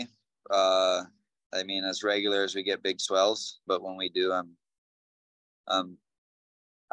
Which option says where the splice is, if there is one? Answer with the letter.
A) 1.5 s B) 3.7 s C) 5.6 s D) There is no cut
B